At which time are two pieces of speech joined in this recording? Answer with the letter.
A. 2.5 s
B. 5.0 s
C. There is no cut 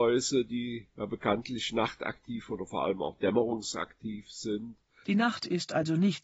B